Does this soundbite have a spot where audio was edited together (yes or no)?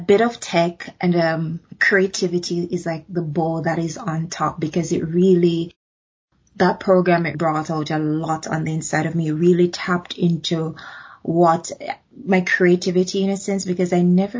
yes